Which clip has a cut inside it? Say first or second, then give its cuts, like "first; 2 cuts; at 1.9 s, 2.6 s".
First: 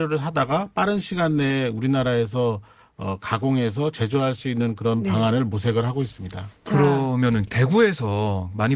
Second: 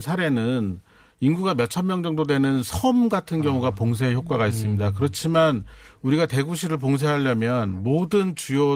first; 1 cut; at 6.5 s